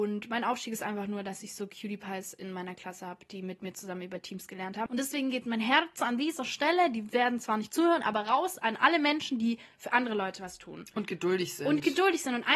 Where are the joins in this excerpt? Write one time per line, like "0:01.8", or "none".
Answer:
0:04.9